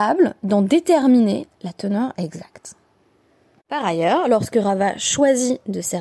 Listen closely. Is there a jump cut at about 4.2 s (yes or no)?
no